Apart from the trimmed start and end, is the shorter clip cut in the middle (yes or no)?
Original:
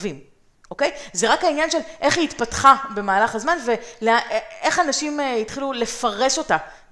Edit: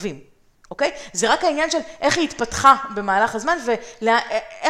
no